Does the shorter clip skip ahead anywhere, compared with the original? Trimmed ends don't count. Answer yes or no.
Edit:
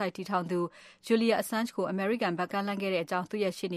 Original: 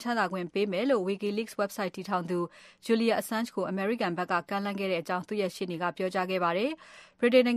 yes